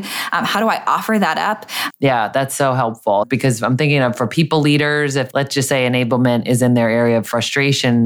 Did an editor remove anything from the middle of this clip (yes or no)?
yes